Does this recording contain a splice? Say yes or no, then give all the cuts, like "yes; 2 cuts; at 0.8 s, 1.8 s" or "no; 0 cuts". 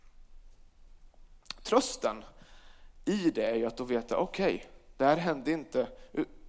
no; 0 cuts